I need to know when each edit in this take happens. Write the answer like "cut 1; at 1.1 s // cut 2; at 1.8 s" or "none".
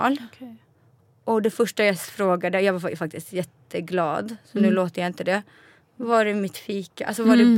none